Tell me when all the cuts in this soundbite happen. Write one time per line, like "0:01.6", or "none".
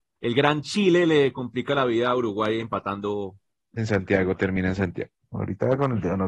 0:03.7
0:05.3